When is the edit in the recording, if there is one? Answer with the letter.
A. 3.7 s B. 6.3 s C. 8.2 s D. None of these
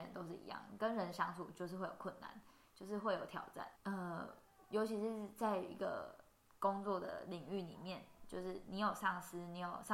A